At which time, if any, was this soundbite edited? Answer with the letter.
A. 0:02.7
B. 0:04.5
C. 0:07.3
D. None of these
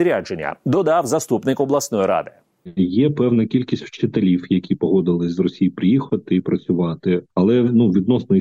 D